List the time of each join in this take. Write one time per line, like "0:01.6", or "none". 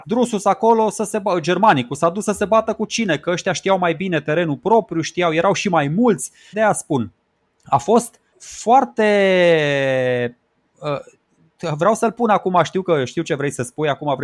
0:06.5
0:08.3